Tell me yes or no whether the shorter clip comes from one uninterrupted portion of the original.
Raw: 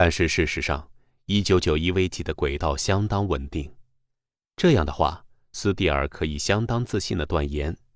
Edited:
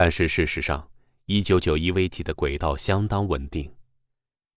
yes